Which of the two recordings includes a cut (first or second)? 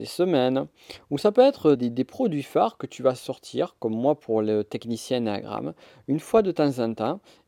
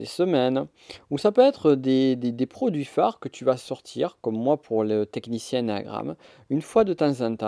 first